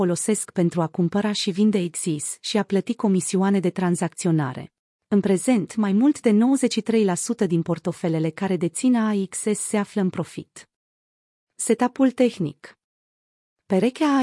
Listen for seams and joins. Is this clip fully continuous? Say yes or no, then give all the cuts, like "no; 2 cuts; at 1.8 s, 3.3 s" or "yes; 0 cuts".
no; 1 cut; at 5.0 s